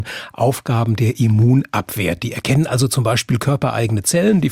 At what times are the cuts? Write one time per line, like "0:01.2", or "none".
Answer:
none